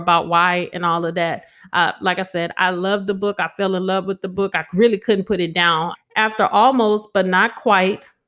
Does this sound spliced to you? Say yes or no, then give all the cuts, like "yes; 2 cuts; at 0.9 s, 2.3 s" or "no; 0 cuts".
yes; 1 cut; at 5.9 s